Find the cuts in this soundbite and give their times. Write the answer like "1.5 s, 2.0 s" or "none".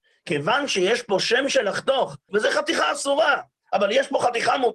2.3 s

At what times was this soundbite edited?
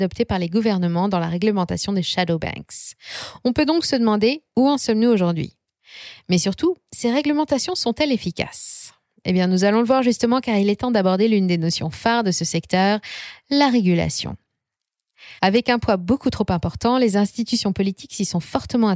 15.4 s

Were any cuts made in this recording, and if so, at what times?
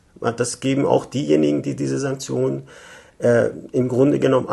none

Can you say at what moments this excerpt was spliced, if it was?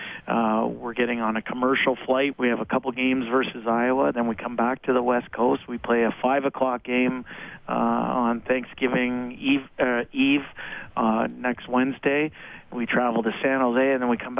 2.3 s

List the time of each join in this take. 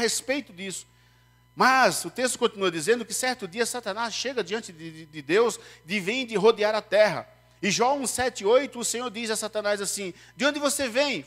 none

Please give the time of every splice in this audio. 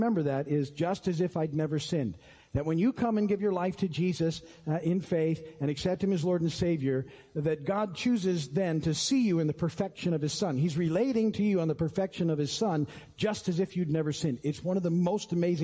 none

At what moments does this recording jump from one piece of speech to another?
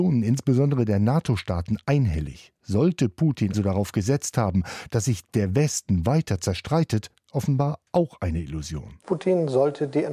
3.5 s

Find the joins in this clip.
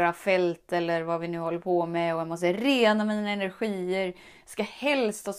none

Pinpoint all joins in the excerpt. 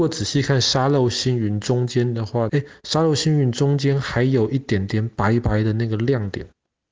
2.5 s

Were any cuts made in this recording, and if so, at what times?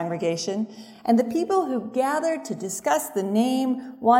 none

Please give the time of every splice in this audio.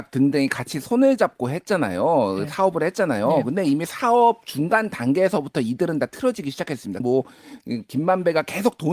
7.0 s

